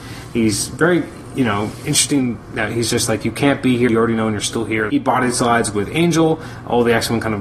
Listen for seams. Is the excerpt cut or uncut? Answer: cut